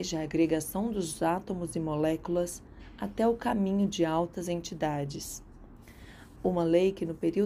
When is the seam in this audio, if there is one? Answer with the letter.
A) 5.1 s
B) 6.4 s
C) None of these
B